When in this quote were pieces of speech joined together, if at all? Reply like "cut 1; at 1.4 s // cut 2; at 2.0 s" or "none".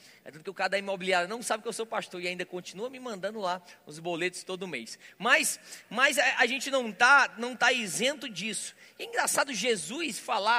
none